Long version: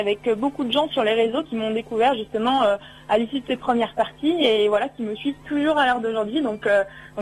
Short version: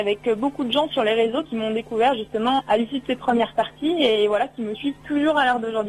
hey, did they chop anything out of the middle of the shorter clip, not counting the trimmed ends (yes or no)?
yes